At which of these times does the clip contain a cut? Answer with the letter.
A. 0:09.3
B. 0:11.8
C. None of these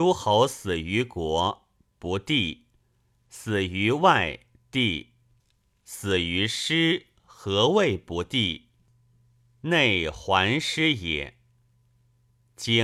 C